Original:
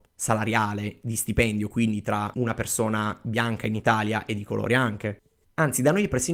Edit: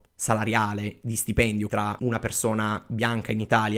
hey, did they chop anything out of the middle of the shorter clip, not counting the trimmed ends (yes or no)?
yes